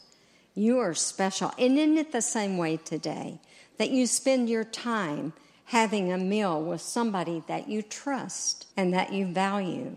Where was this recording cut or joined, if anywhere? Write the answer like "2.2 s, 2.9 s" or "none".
8.7 s